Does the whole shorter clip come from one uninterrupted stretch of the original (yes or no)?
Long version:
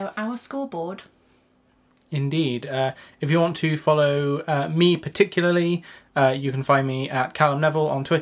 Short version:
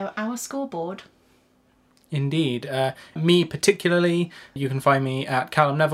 no